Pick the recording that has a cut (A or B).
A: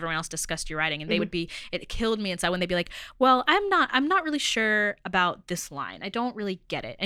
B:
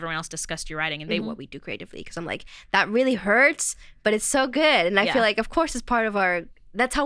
B